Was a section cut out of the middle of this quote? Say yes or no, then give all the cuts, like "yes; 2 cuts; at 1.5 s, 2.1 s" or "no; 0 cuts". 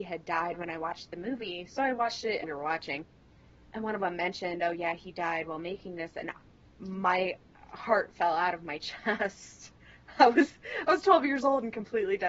yes; 1 cut; at 2.4 s